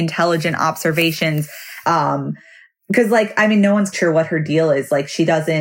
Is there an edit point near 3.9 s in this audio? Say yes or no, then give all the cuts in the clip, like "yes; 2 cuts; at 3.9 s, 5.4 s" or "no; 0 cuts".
yes; 2 cuts; at 1.8 s, 3.9 s